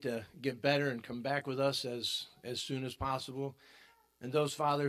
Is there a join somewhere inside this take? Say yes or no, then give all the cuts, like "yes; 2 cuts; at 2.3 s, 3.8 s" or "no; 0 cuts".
no; 0 cuts